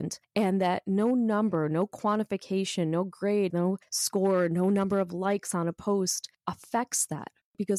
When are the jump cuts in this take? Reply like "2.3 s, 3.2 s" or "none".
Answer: 3.5 s